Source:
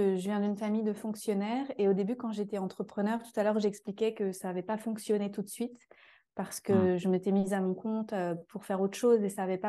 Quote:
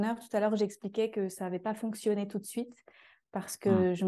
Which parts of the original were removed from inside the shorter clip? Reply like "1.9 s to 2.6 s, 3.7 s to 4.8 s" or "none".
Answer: none